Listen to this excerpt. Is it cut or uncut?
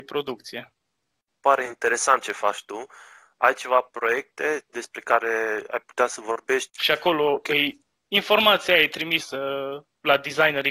cut